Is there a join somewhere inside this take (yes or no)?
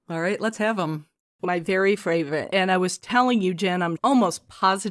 yes